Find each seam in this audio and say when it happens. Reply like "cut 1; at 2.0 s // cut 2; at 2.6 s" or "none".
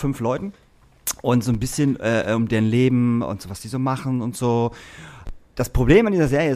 none